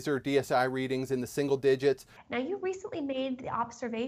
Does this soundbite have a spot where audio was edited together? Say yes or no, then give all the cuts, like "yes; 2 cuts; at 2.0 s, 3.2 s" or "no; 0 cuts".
yes; 1 cut; at 2.2 s